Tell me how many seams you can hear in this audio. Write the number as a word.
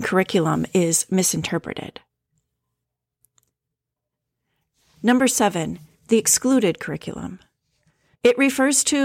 one